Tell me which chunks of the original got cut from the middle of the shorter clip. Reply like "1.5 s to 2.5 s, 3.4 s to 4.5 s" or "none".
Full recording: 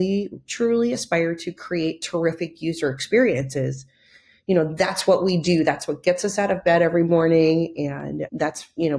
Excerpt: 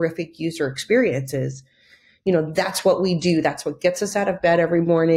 none